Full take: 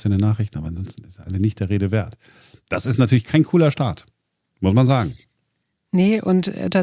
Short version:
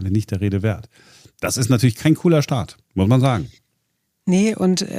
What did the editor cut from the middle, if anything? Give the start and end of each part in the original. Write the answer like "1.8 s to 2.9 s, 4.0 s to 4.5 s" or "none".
4.1 s to 4.5 s